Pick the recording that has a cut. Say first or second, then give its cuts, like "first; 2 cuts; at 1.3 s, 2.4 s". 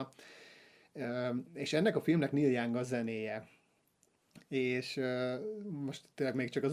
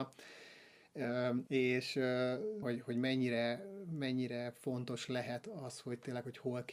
second; 2 cuts; at 1.5 s, 2.6 s